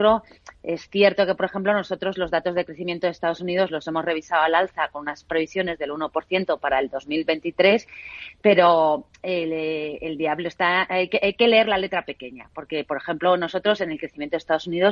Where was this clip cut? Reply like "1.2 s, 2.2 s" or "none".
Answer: none

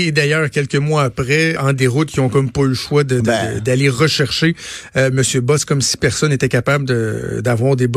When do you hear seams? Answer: 1.6 s

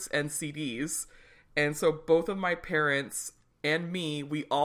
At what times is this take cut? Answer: none

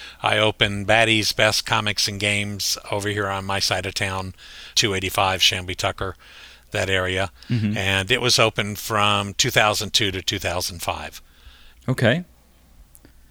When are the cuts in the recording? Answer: 4.7 s, 11.7 s

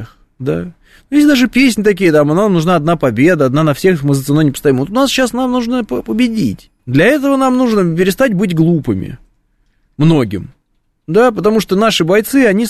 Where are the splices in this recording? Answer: 6.8 s

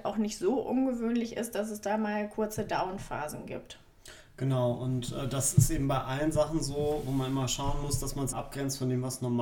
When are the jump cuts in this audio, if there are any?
8.3 s

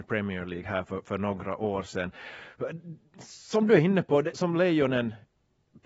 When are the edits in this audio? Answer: 4.3 s

